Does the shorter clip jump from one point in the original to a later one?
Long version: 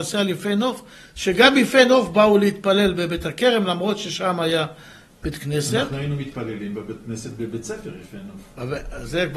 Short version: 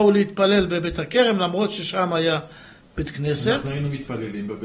no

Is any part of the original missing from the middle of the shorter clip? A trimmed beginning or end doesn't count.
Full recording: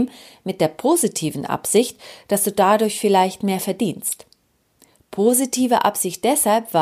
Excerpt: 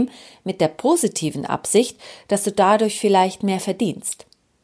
no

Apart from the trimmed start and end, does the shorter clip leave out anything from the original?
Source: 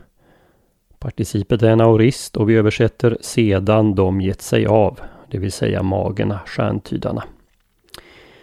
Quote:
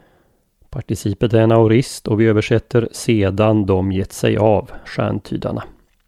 yes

